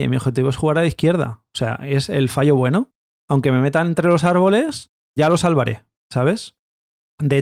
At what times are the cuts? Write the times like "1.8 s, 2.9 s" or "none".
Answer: none